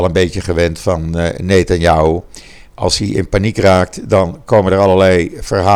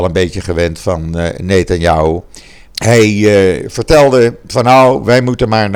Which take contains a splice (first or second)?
second